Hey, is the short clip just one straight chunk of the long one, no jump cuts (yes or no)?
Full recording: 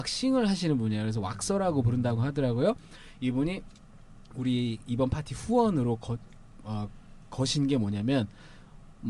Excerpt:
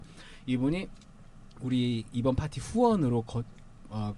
yes